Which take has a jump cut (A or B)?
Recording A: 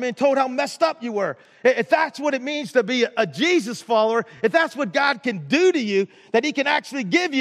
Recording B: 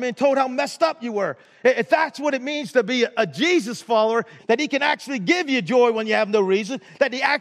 B